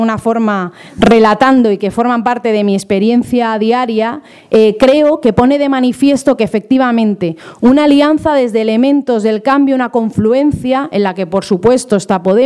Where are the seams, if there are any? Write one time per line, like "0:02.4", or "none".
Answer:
none